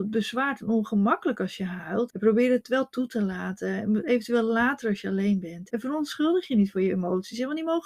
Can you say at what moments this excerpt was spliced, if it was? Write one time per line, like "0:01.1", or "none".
0:02.1
0:05.7